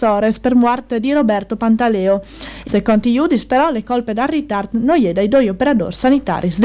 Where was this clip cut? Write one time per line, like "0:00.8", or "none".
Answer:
0:02.6